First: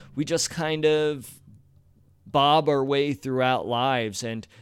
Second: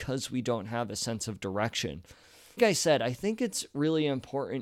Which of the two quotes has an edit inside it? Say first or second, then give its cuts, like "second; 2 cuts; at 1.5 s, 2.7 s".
second; 1 cut; at 2.6 s